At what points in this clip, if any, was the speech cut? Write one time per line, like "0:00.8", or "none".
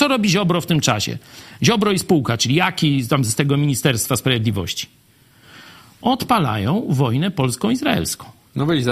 none